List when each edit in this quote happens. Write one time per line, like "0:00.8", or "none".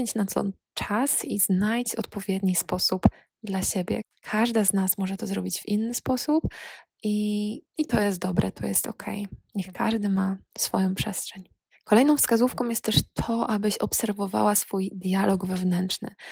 none